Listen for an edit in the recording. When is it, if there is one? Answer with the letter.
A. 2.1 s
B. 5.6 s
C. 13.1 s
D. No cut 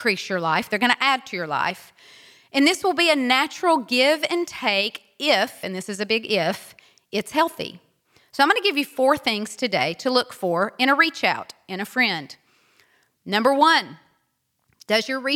D